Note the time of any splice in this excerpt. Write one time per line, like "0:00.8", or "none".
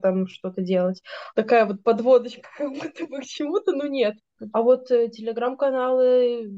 0:01.3
0:04.5